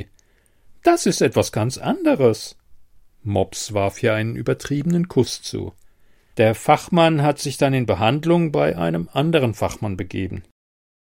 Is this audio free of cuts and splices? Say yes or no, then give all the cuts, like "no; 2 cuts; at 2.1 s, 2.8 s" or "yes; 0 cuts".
no; 1 cut; at 6.3 s